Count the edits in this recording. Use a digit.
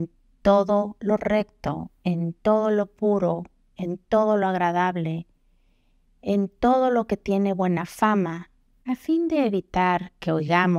1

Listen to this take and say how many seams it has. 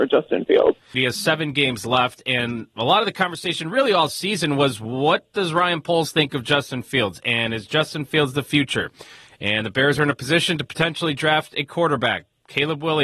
1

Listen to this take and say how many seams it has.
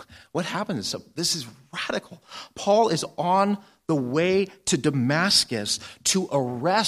0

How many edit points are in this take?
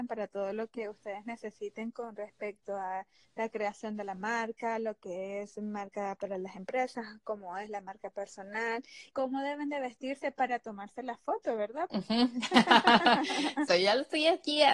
3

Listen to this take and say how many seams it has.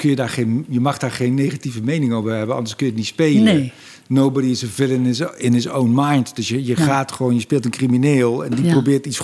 0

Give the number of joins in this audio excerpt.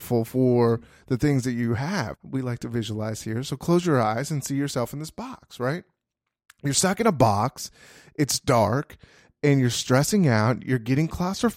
1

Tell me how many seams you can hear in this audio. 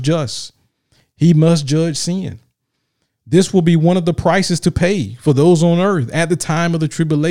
0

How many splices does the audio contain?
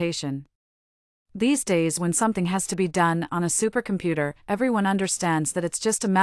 0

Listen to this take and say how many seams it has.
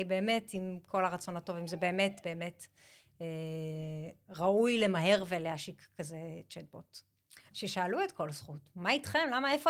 2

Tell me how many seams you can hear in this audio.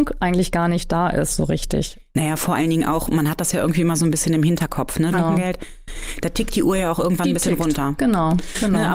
1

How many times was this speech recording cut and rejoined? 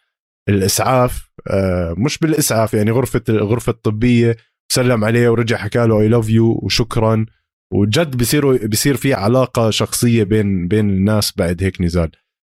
0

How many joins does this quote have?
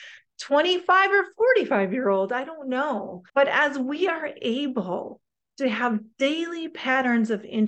1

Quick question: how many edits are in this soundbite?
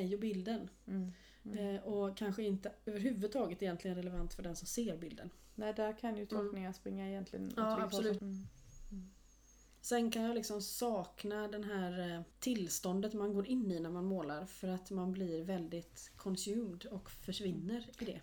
2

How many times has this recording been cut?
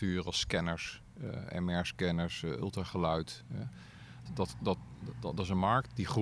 1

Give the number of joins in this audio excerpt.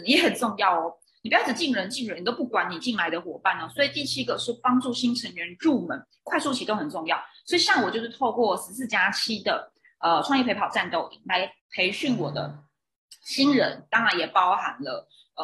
1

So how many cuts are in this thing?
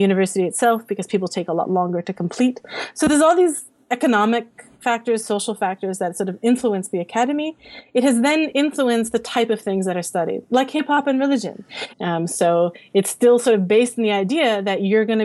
1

